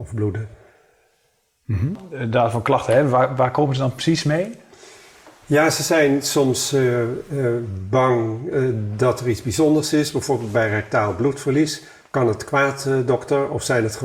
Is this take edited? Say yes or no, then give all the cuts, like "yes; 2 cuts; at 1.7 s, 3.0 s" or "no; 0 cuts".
no; 0 cuts